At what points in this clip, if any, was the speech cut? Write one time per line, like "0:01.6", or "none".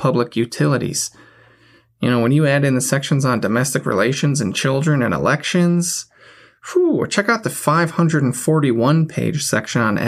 none